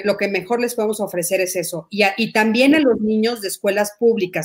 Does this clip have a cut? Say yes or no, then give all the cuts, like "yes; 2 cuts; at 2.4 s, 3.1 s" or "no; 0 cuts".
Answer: no; 0 cuts